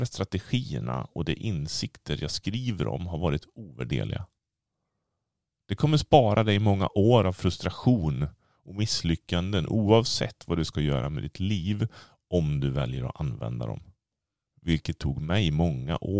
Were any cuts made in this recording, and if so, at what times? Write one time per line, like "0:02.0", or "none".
0:14.5